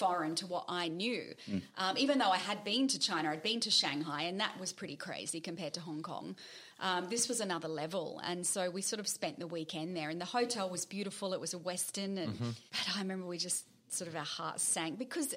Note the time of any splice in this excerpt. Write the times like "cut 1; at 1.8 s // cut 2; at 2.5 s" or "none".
cut 1; at 12.7 s